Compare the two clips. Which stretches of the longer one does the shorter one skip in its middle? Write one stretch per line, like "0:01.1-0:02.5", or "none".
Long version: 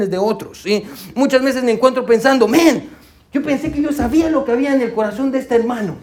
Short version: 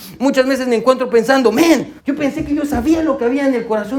0:02.9-0:03.2